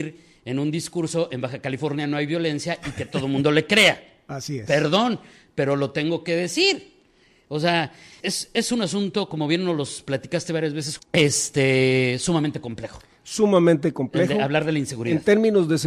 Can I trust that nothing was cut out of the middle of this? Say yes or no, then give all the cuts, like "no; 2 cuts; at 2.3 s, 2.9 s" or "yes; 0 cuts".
no; 2 cuts; at 8.2 s, 11.0 s